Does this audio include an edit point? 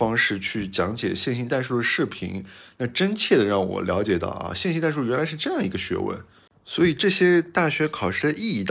no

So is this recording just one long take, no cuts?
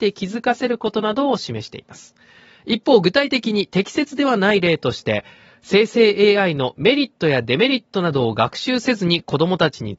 yes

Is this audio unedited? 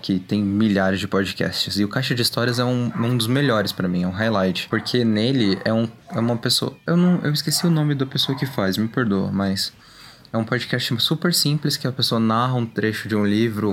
yes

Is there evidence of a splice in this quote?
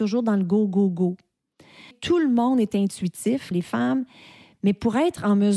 yes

